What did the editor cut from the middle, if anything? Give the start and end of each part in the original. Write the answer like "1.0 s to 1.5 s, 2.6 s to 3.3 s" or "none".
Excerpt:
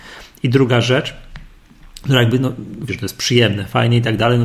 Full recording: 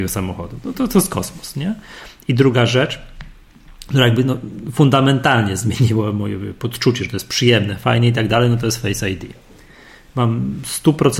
4.7 s to 7.0 s